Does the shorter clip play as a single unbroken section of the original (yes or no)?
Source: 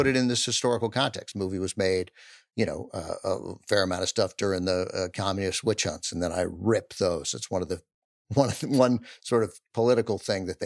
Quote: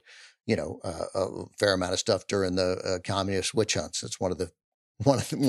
no